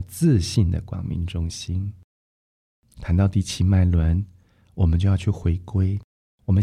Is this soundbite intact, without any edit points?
yes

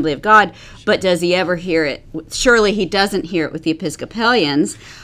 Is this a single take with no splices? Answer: yes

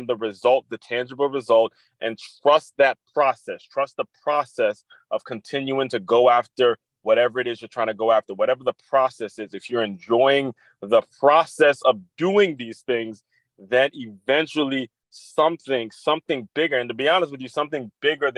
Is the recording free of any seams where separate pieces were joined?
yes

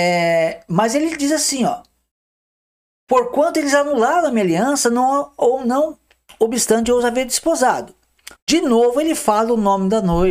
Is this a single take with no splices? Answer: no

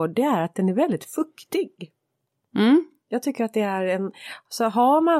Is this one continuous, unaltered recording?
yes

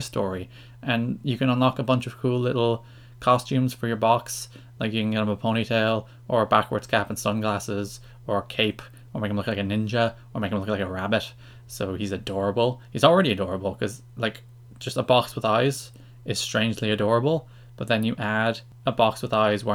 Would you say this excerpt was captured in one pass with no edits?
yes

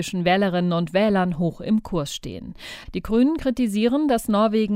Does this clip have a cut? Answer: yes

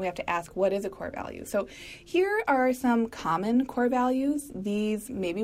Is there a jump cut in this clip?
no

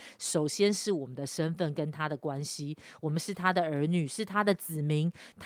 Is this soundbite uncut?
yes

